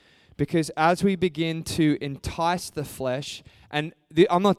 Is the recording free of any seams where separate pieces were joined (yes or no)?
yes